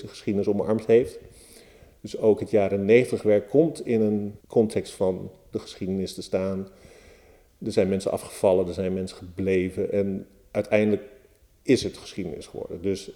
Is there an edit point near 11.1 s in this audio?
no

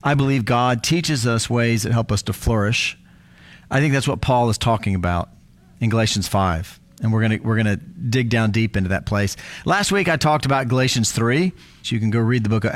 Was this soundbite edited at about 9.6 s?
no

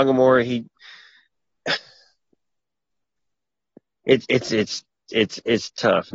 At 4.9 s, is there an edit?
no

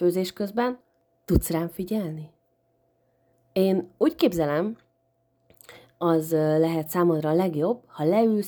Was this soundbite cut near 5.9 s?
no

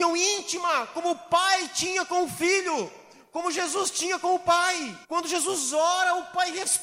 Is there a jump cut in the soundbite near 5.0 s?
yes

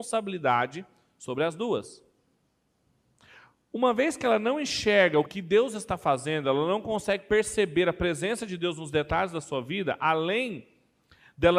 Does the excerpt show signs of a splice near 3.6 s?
no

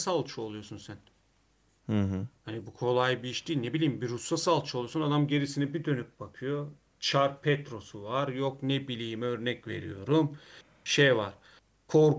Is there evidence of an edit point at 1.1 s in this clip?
no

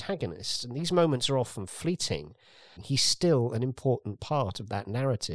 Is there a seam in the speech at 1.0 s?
no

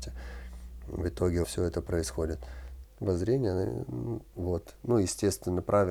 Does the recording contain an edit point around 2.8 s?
yes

